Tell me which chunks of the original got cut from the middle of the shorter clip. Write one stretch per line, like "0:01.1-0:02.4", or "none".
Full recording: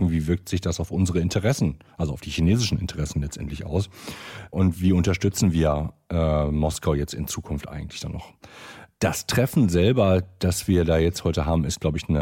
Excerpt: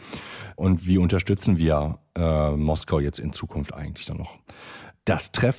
none